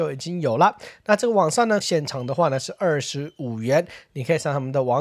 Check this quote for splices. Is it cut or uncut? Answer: cut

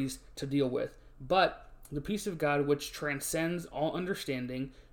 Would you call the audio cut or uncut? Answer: uncut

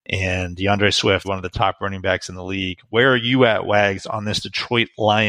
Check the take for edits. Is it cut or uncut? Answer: cut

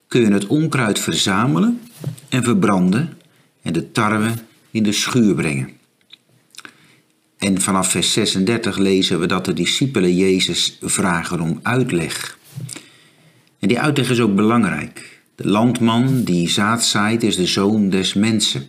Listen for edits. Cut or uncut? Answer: uncut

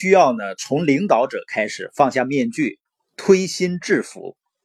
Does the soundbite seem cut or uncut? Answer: uncut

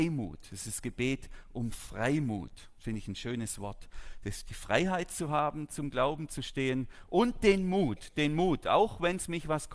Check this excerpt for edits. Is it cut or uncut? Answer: uncut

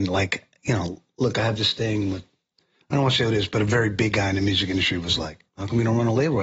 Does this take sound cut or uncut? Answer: uncut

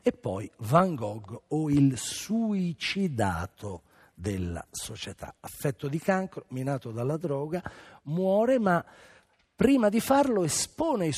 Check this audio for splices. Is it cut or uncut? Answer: uncut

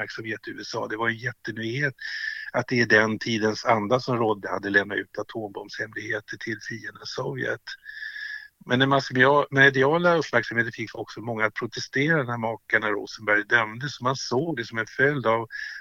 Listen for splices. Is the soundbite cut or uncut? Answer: uncut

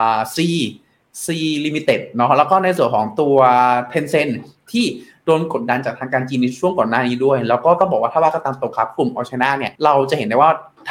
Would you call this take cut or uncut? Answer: cut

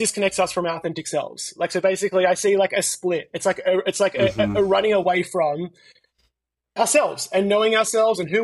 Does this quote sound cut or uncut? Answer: uncut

